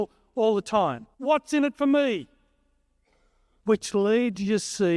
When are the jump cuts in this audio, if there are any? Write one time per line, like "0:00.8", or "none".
0:01.1
0:03.6